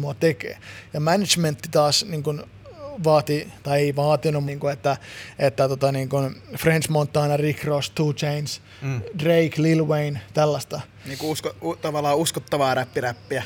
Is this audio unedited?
no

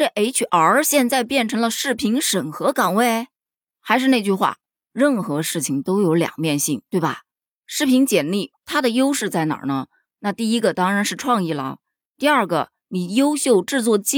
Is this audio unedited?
yes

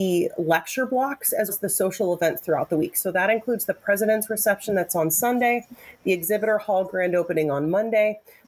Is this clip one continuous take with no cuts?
no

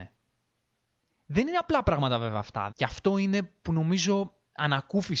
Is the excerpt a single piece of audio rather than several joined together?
no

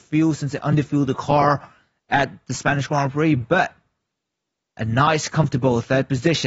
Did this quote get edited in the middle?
no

